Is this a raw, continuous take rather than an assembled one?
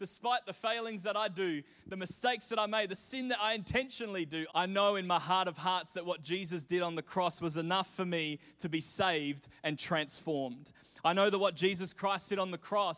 no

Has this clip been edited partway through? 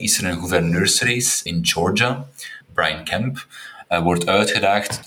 yes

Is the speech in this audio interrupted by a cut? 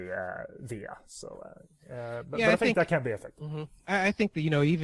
no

